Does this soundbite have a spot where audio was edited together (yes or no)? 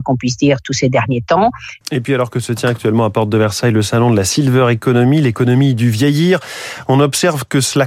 yes